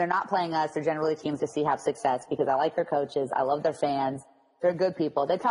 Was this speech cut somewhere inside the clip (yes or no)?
yes